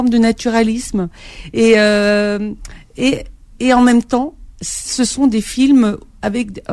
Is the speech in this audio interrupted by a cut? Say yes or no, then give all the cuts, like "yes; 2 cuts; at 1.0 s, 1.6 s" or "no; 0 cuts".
no; 0 cuts